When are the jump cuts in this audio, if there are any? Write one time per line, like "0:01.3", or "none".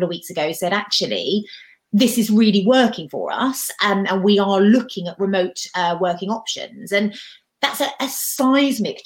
none

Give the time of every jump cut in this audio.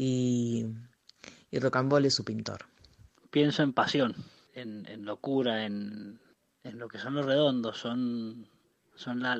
none

